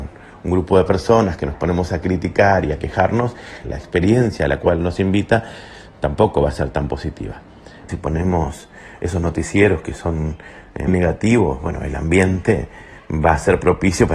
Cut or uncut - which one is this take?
cut